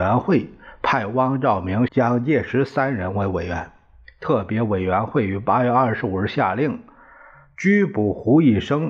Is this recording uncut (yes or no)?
no